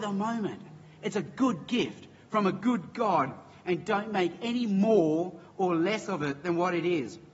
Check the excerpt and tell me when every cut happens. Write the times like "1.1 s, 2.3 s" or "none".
none